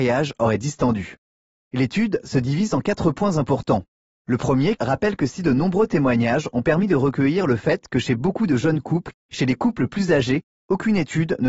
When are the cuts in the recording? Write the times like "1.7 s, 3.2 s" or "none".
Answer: 4.8 s, 9.2 s